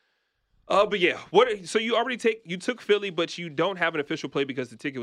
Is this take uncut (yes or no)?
yes